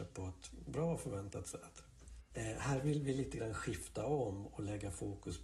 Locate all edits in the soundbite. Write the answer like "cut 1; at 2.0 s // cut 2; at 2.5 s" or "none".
cut 1; at 2.3 s